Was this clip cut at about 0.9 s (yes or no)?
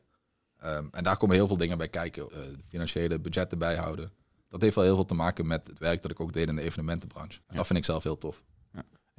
no